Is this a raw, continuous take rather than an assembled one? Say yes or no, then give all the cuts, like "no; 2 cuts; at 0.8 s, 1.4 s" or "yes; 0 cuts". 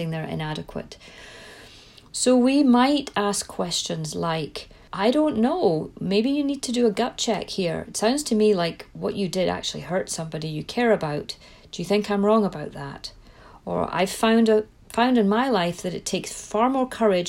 no; 1 cut; at 4.9 s